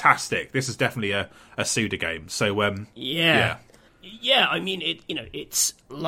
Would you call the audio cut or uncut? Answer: uncut